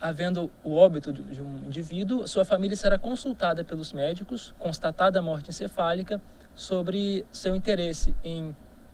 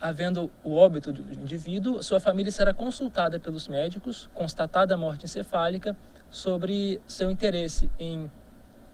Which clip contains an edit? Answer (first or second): second